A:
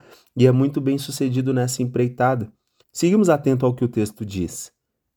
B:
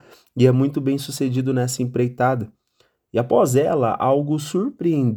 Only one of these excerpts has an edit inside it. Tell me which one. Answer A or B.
A